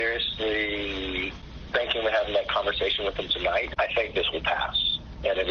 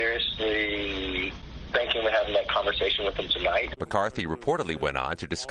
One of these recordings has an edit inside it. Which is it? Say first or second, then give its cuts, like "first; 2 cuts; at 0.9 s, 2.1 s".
first; 1 cut; at 3.8 s